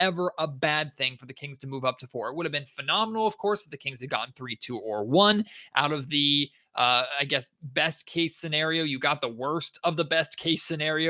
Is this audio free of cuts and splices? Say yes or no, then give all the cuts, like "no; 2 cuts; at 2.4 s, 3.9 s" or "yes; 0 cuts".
yes; 0 cuts